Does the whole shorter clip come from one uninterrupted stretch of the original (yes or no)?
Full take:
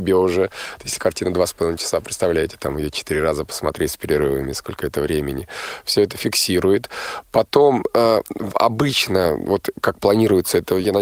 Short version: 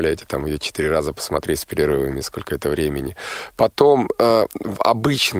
no